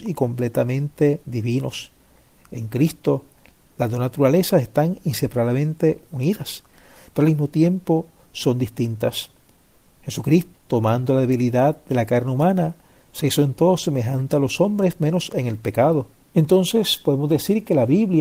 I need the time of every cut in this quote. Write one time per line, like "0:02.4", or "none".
0:10.5
0:16.2